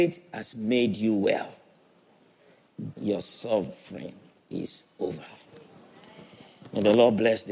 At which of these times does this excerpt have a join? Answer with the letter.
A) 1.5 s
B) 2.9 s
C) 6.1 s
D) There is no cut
B